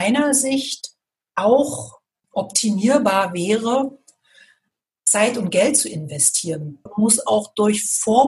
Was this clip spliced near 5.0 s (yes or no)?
no